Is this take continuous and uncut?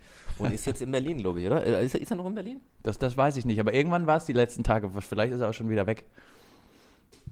yes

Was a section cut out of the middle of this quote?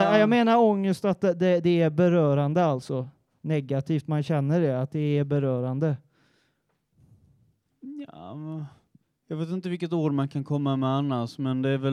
no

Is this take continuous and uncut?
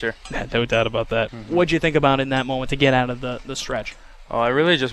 no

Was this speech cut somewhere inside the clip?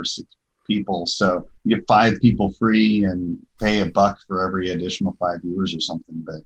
yes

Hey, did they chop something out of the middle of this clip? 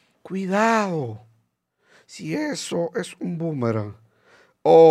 no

